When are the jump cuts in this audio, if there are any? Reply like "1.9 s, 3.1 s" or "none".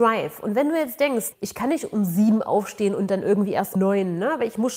1.3 s, 3.8 s